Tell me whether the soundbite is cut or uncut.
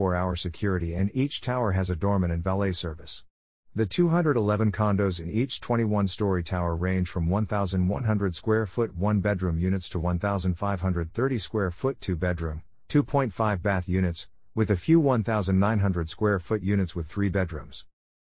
uncut